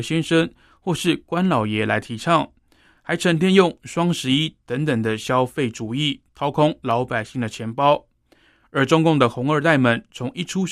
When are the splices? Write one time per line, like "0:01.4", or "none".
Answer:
0:02.9

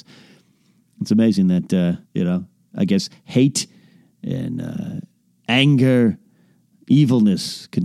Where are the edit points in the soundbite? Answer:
0:02.0

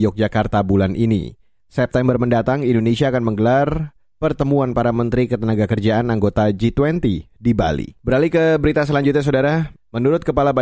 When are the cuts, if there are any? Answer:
0:08.0
0:09.7

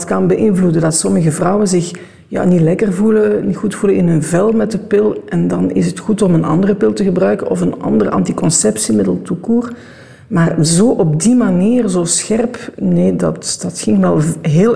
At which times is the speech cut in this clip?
none

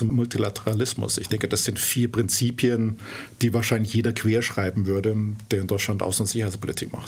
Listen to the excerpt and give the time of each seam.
none

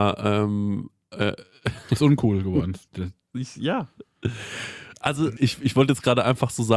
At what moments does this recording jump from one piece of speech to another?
0:05.4

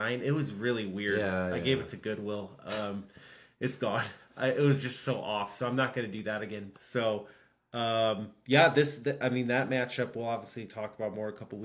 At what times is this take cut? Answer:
0:06.7

